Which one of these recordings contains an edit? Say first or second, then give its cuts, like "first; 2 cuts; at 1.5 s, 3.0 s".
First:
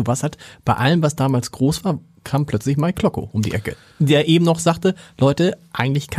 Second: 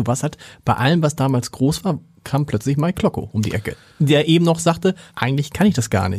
second; 1 cut; at 5.1 s